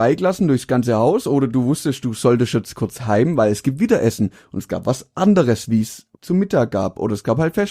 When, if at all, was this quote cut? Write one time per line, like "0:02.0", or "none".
0:06.1